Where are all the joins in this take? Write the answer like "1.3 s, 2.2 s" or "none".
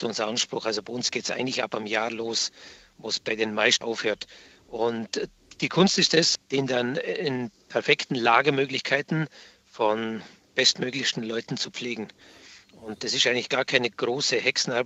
3.8 s, 6.4 s